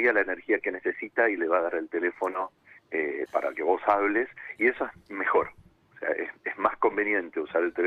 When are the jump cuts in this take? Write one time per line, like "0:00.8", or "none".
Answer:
0:03.3